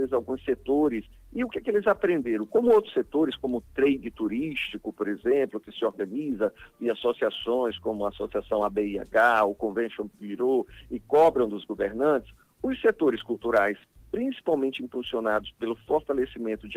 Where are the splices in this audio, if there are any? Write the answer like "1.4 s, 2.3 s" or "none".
none